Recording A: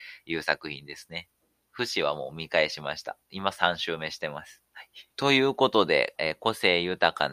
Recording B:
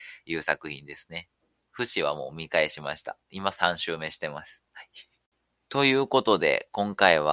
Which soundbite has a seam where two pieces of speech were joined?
A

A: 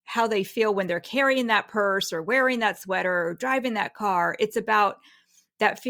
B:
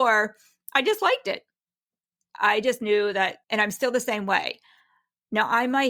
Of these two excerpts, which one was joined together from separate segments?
B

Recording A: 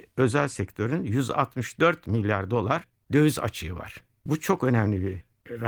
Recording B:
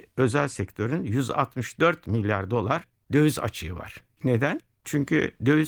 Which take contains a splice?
B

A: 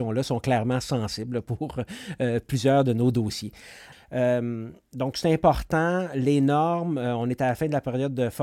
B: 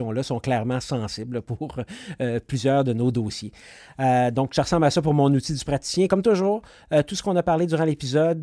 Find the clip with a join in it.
A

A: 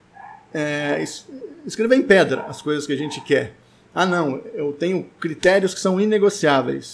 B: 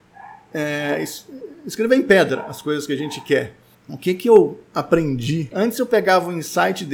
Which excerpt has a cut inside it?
B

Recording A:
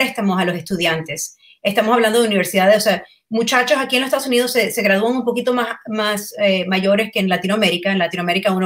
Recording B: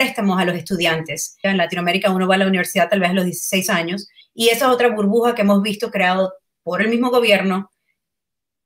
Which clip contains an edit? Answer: B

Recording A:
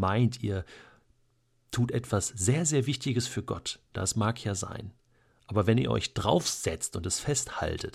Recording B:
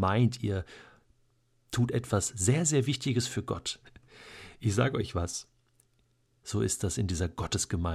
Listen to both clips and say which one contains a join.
B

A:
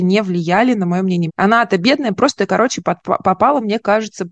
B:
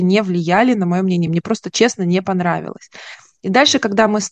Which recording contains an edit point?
A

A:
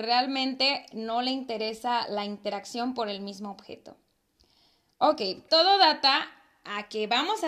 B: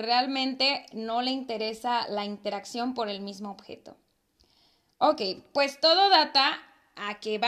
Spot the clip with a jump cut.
A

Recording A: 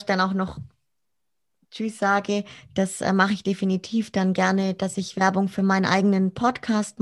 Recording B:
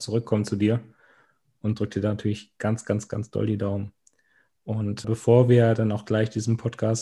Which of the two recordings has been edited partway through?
B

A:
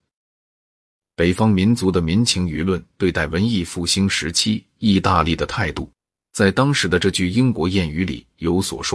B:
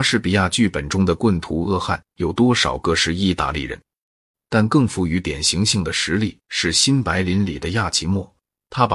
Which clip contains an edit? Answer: B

